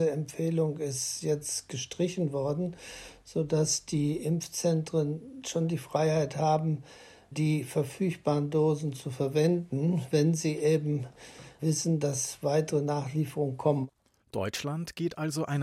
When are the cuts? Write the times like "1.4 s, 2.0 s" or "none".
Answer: none